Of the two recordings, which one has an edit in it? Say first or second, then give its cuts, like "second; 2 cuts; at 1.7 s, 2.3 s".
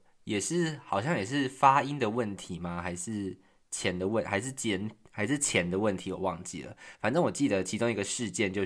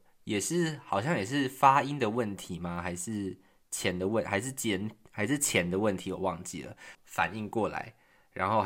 second; 1 cut; at 6.9 s